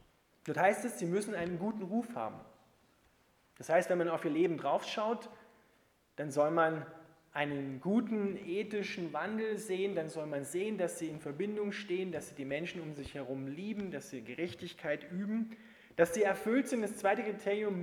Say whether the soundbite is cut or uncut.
uncut